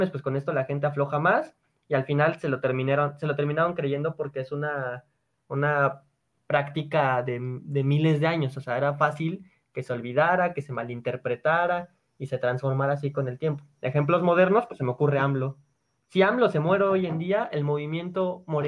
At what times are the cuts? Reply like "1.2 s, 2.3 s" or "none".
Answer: none